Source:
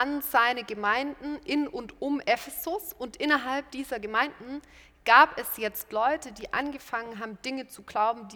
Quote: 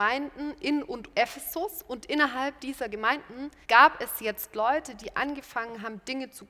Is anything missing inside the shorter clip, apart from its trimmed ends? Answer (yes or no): yes